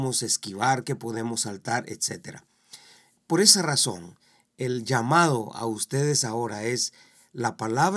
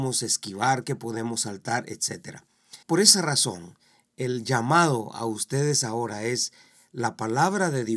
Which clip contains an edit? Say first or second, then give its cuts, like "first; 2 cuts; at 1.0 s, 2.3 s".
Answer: second; 1 cut; at 2.8 s